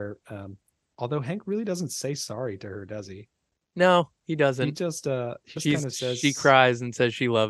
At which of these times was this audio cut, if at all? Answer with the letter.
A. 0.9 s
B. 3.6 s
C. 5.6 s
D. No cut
C